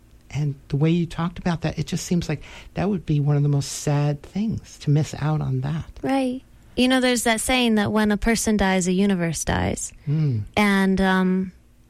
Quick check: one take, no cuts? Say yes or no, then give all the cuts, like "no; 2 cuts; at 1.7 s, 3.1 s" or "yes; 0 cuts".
yes; 0 cuts